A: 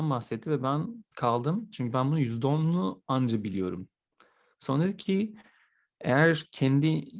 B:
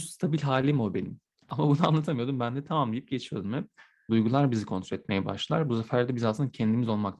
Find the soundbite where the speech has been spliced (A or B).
B